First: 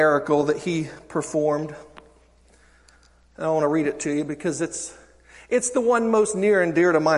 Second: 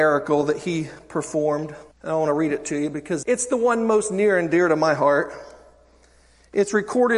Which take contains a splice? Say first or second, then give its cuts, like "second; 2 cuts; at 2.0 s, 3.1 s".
second; 2 cuts; at 1.9 s, 3.2 s